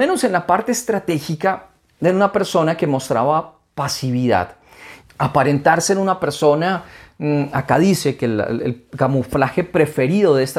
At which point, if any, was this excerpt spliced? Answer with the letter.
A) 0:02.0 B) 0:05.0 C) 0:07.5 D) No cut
B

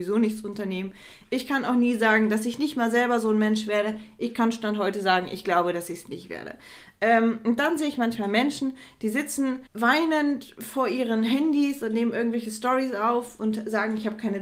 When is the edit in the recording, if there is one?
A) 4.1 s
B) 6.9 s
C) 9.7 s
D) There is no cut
C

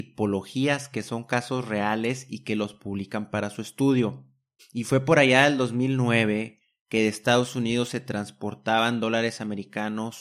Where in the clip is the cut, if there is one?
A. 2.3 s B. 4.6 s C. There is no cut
B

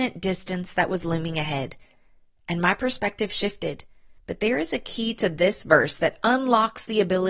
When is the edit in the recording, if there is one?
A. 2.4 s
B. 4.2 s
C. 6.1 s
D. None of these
B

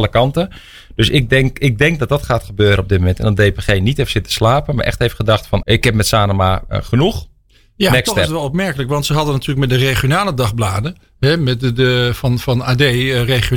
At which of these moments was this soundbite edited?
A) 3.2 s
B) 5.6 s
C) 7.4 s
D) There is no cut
B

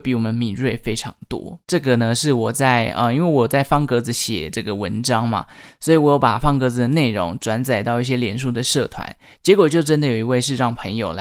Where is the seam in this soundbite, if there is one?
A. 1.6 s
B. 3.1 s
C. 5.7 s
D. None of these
A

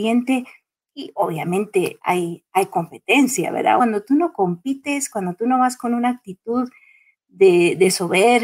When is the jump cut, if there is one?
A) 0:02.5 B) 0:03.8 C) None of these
B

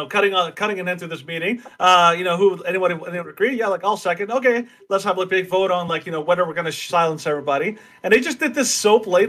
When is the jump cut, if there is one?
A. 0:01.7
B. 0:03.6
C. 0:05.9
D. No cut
D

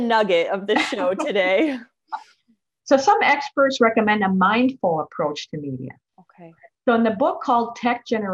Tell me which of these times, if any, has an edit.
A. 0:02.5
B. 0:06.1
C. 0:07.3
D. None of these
B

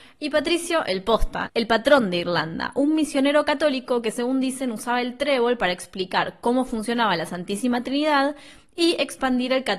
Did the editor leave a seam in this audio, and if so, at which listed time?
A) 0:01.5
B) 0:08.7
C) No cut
A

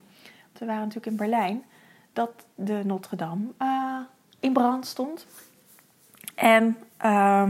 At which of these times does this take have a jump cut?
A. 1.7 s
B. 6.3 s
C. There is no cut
C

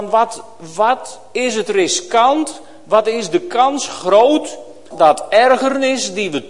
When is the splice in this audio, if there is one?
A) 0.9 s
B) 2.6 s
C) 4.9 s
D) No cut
C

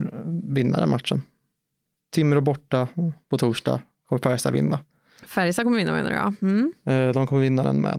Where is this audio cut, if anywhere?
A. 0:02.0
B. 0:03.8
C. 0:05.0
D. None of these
A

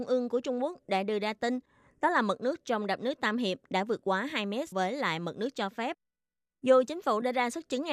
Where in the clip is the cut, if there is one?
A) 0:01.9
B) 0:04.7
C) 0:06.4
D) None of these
B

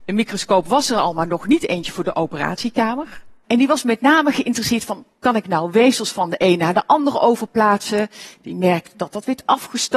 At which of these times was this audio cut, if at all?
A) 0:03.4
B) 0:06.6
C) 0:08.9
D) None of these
A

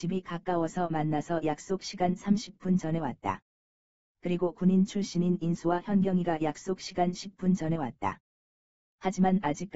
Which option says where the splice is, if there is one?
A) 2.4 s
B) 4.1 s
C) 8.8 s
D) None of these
C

